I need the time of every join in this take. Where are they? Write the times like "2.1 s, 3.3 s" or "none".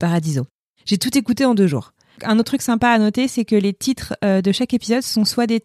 2.2 s